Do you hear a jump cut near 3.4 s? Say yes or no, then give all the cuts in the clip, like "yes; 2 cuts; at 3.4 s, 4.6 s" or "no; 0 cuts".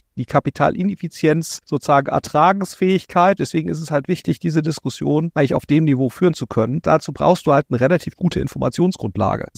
yes; 1 cut; at 3.4 s